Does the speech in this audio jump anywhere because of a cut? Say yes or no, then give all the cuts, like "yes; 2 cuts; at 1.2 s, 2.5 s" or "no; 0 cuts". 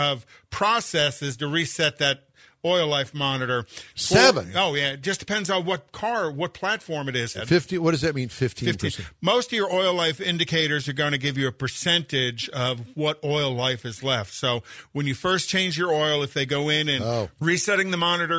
yes; 2 cuts; at 7.3 s, 17.3 s